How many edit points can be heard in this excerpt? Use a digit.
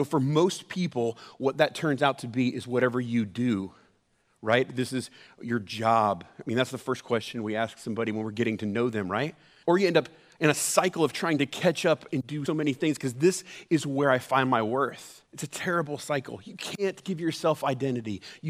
3